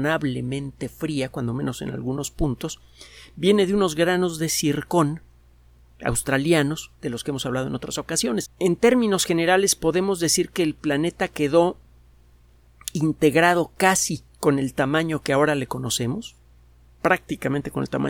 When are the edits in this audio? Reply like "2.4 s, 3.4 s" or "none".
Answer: 8.4 s, 14.3 s